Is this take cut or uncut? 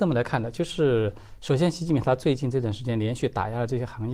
uncut